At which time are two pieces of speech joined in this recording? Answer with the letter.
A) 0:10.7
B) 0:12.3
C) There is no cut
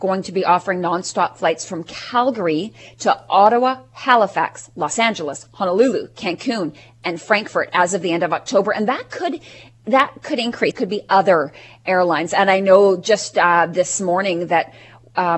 A